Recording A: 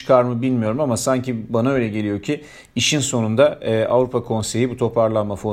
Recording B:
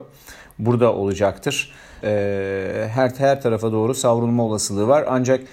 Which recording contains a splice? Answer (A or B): B